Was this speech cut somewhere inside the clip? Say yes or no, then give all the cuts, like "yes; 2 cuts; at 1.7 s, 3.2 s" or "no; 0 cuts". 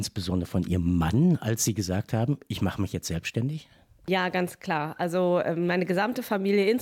no; 0 cuts